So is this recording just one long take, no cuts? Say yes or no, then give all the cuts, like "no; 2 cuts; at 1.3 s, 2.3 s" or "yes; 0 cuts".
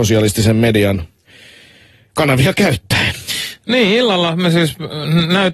yes; 0 cuts